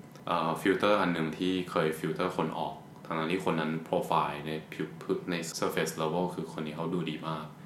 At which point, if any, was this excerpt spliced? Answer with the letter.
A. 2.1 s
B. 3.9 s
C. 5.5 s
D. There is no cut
C